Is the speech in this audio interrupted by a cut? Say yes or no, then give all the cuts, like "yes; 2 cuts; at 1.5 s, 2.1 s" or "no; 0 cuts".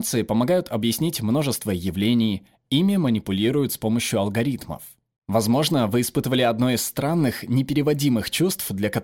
yes; 2 cuts; at 2.6 s, 5.2 s